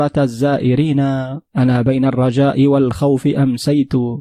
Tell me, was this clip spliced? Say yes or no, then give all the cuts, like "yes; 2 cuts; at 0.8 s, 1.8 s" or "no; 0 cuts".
yes; 1 cut; at 1.5 s